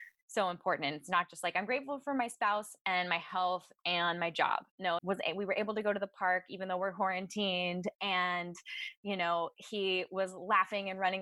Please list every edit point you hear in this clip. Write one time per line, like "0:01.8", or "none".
0:05.0